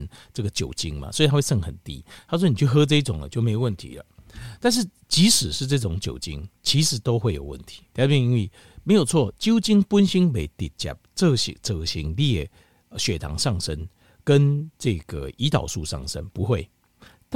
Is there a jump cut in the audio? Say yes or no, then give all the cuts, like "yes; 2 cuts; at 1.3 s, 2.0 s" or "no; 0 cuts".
yes; 1 cut; at 7.9 s